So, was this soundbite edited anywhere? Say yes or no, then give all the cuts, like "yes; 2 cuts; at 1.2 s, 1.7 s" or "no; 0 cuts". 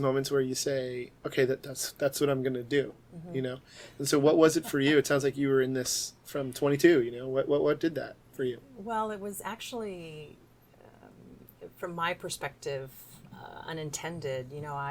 yes; 1 cut; at 8.2 s